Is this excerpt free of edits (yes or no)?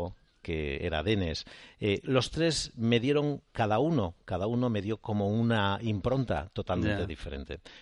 yes